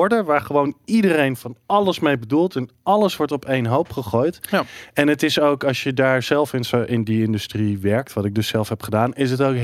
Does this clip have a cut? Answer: no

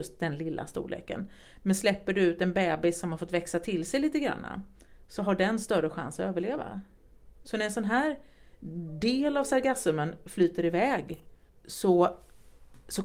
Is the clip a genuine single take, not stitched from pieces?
no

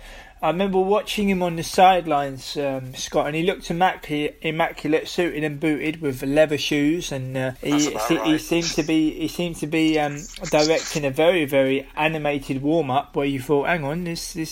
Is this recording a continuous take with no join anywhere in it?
no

